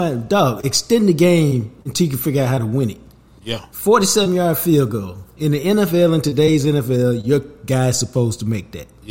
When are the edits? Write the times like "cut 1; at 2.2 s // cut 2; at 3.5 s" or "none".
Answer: none